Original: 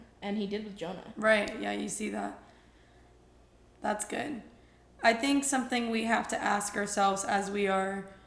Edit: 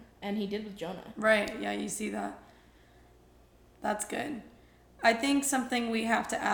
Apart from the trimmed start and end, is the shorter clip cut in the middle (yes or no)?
no